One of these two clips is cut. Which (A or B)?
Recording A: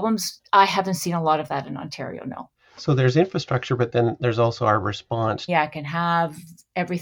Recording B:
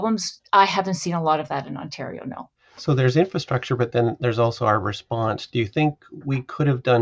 A